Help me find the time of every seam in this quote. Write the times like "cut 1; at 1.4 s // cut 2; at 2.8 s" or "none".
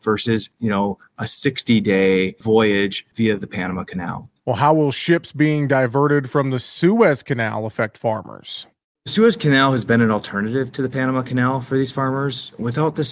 cut 1; at 4.4 s